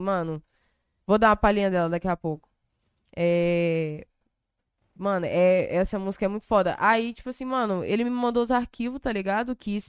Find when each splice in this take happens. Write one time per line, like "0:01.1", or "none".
none